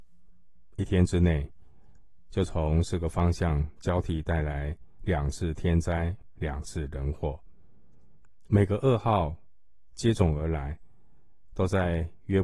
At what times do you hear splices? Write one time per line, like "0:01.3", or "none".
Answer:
0:08.5